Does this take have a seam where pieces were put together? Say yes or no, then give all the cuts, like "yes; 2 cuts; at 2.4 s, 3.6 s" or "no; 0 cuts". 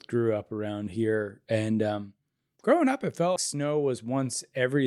yes; 1 cut; at 3.4 s